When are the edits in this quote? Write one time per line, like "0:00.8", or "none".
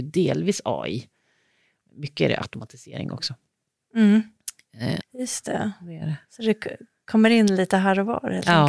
0:05.0
0:06.2